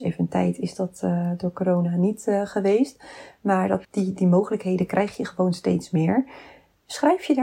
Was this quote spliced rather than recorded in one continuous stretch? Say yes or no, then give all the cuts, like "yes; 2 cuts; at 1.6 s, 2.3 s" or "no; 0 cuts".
yes; 1 cut; at 3.8 s